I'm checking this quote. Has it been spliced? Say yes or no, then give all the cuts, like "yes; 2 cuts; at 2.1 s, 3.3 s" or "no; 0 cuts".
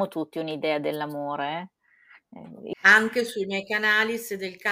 yes; 1 cut; at 2.7 s